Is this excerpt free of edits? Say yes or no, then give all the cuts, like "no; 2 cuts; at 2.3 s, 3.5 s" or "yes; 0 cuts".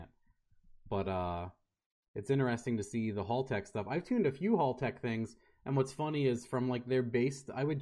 yes; 0 cuts